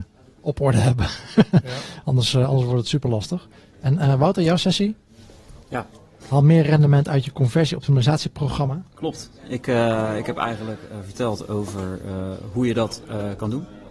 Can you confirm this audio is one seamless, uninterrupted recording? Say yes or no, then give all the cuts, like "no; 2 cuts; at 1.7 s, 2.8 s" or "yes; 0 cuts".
yes; 0 cuts